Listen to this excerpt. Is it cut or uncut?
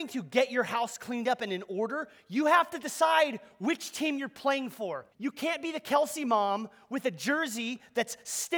cut